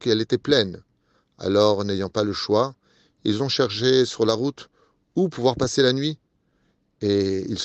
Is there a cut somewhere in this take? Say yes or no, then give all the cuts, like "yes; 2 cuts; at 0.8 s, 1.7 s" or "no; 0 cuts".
no; 0 cuts